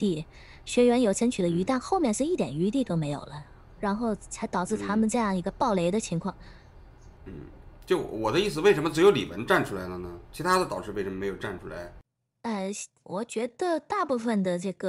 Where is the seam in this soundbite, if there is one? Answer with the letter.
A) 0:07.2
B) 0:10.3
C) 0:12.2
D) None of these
D